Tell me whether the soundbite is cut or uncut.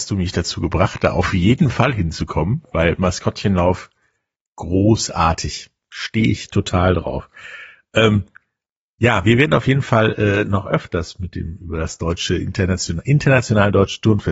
uncut